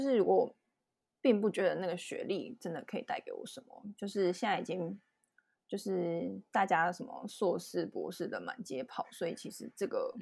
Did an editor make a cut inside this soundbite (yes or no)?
no